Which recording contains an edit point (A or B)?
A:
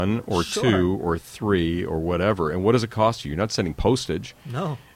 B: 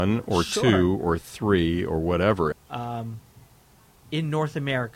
B